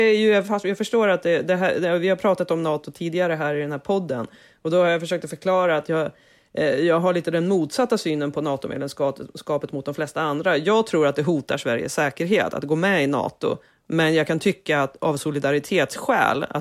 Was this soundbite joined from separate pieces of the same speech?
no; 0 cuts

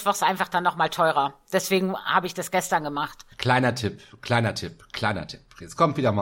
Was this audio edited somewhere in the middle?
no; 0 cuts

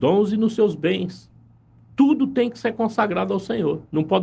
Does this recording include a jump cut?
no; 0 cuts

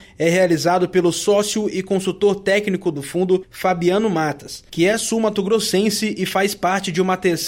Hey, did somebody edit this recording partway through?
no; 0 cuts

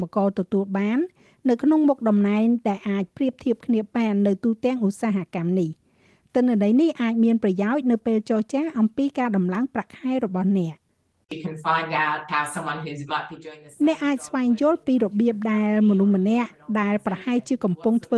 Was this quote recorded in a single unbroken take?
yes; 0 cuts

